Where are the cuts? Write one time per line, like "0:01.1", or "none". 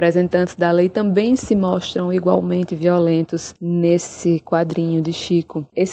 none